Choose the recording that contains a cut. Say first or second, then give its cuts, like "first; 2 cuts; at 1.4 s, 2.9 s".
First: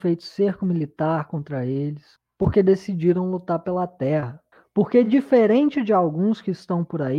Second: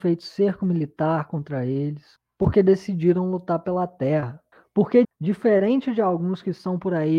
second; 1 cut; at 5.0 s